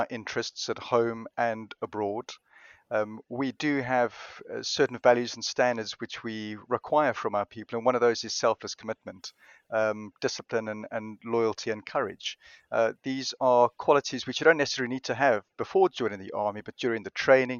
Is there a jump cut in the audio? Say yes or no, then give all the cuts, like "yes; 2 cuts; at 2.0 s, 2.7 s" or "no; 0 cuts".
no; 0 cuts